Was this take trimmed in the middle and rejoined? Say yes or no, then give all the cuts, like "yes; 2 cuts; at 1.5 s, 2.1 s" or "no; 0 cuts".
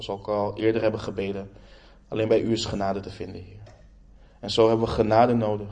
no; 0 cuts